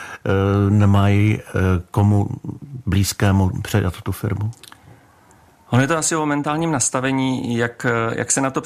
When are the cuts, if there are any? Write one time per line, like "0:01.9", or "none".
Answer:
none